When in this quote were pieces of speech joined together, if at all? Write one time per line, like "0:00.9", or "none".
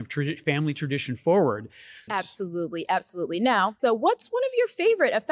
0:02.1
0:03.8